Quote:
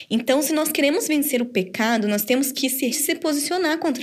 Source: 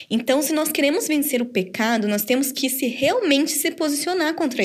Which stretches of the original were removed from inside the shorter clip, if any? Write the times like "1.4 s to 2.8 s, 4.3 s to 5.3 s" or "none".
2.9 s to 3.5 s

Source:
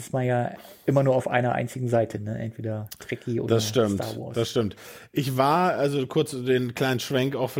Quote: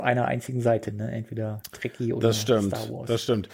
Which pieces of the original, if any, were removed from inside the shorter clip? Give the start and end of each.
none

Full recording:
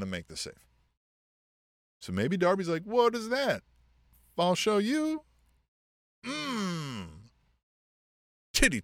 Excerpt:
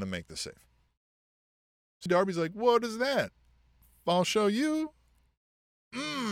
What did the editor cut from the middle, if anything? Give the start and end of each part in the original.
2.1 s to 2.4 s

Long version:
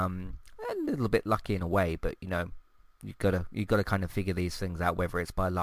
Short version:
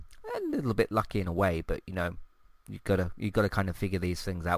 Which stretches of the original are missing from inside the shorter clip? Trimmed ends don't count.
none

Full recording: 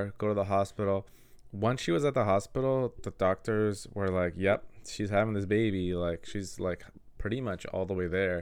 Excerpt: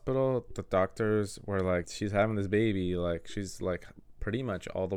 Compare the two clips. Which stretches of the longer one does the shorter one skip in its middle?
4.3 s to 4.8 s

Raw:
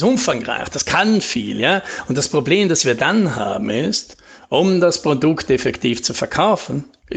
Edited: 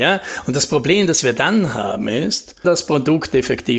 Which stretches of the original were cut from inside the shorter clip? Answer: 4.3 s to 4.8 s

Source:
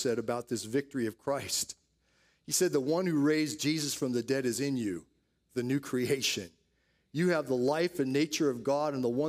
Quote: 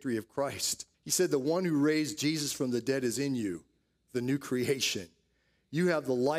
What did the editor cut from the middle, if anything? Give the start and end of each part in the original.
1.8 s to 2.4 s

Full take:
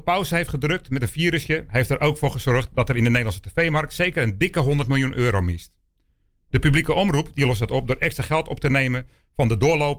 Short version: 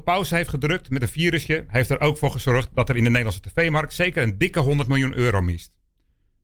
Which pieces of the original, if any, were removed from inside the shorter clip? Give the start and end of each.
none

